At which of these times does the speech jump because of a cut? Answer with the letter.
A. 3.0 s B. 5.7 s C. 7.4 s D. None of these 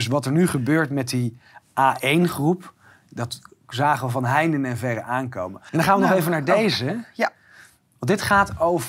B